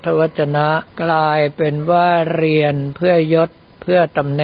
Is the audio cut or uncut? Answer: cut